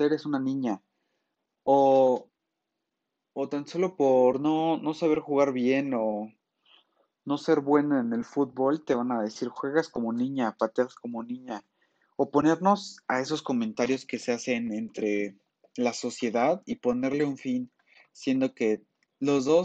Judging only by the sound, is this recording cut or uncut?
uncut